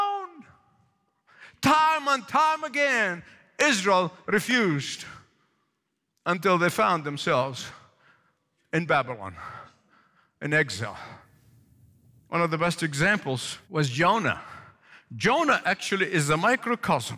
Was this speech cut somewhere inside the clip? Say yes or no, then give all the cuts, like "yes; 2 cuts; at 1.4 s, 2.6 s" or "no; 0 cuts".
yes; 1 cut; at 13.6 s